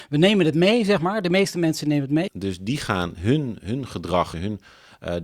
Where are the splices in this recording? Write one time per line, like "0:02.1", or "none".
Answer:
0:02.3
0:04.3